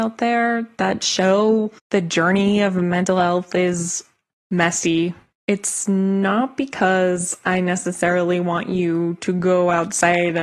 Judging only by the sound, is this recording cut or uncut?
cut